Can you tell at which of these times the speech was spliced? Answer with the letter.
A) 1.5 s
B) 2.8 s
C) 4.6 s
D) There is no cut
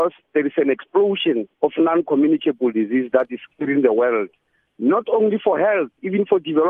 A